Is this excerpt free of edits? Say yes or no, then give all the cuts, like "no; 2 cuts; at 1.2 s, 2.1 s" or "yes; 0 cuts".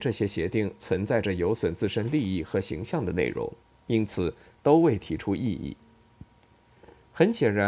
yes; 0 cuts